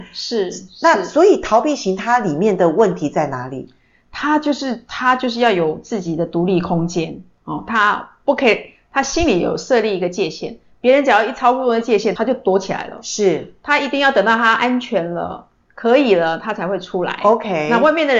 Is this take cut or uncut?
uncut